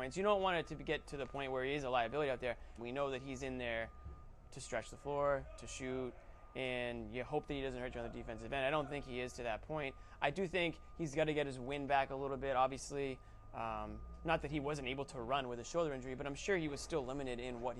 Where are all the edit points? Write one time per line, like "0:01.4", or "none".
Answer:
0:02.8